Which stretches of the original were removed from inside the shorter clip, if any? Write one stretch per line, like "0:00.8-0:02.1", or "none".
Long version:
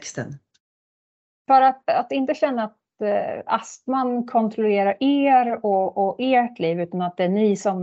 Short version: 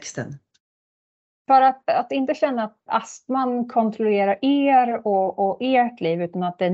0:02.9-0:03.4